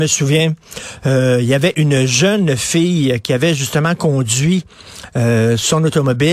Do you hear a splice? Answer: no; 0 cuts

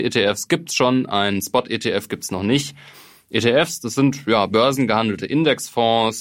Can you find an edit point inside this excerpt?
no; 0 cuts

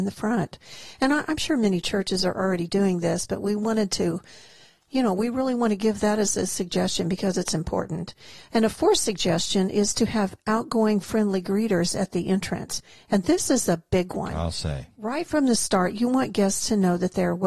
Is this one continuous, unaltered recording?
yes; 0 cuts

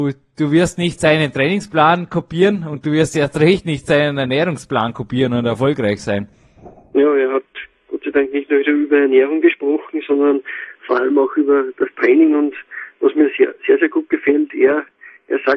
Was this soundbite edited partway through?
no; 0 cuts

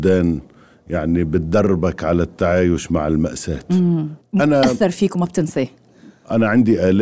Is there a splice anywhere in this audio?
yes; 1 cut; at 4.2 s

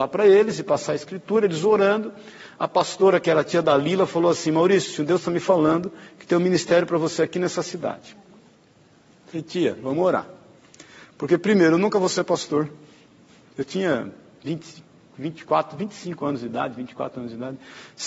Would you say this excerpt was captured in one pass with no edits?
yes; 0 cuts

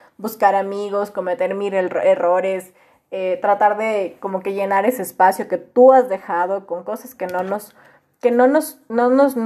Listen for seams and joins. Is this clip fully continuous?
yes; 0 cuts

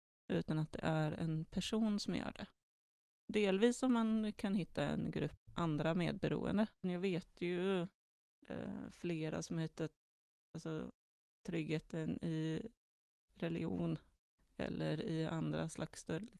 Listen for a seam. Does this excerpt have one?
yes; 1 cut; at 6.8 s

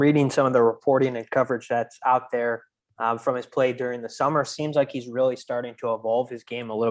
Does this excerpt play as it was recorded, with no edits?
yes; 0 cuts

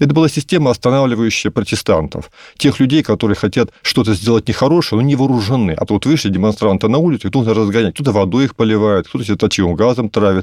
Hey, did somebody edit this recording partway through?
yes; 1 cut; at 5.9 s

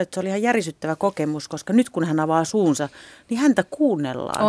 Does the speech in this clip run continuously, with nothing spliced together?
yes; 0 cuts

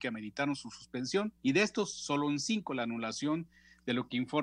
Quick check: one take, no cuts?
no; 1 cut; at 1.4 s

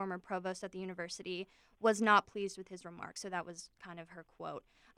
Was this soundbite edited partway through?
no; 0 cuts

